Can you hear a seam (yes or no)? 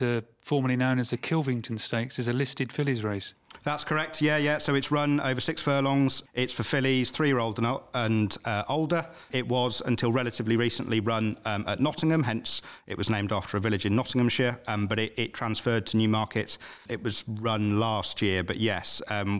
no